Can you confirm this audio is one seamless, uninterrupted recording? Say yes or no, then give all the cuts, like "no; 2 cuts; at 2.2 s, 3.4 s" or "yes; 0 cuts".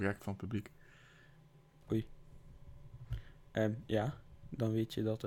yes; 0 cuts